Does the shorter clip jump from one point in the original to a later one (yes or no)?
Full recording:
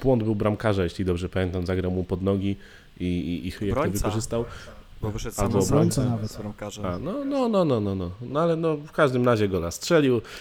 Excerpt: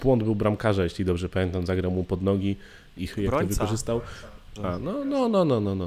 yes